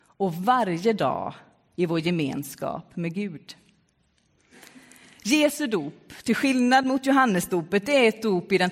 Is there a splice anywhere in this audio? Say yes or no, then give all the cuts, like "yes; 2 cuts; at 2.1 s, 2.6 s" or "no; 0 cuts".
no; 0 cuts